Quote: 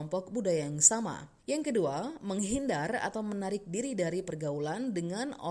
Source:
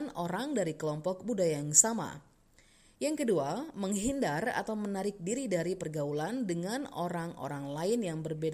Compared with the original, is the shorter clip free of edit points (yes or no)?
no